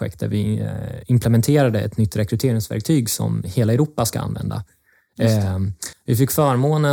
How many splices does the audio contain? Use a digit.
1